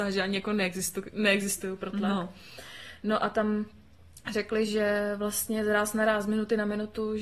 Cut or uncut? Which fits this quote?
uncut